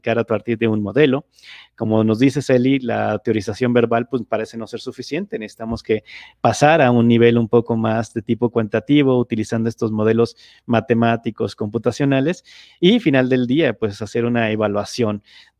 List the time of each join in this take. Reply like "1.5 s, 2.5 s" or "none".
none